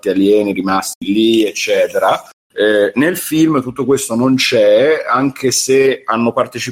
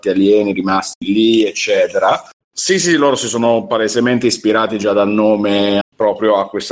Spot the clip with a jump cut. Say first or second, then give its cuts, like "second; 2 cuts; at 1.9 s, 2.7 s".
second; 2 cuts; at 2.4 s, 5.8 s